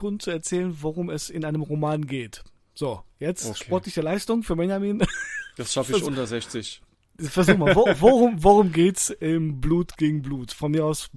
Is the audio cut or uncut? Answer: uncut